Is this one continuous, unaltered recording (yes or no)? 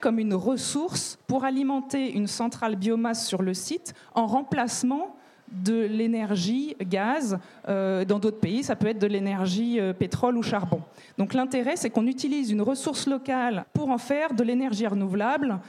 no